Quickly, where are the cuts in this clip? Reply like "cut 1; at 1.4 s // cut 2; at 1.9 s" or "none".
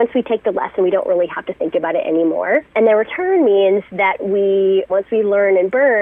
cut 1; at 2.7 s // cut 2; at 4.9 s